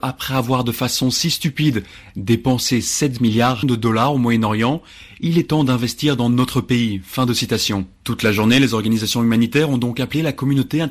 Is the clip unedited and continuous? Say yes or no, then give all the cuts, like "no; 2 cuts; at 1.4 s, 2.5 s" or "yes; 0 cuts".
yes; 0 cuts